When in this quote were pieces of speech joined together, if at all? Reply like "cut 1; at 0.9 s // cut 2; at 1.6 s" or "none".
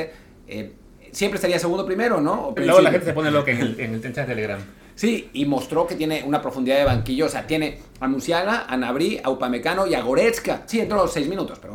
cut 1; at 2.6 s // cut 2; at 10.7 s